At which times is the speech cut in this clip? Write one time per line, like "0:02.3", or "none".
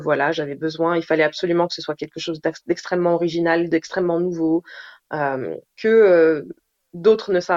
0:05.8